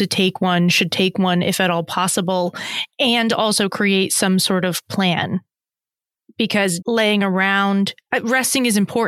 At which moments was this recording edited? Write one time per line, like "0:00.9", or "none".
0:06.8